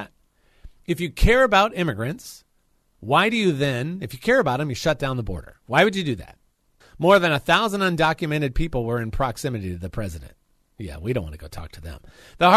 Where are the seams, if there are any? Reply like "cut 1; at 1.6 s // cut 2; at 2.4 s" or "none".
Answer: cut 1; at 6.8 s